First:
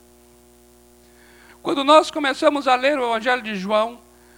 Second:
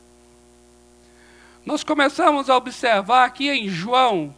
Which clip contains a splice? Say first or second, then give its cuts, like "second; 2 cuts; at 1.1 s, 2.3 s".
first; 1 cut; at 1.5 s